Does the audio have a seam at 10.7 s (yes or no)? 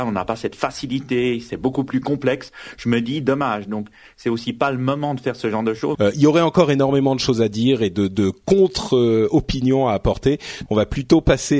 yes